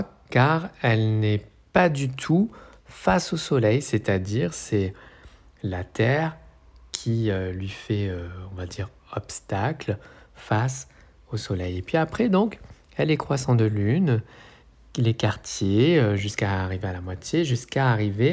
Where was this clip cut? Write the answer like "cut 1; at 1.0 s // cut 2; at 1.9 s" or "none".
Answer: none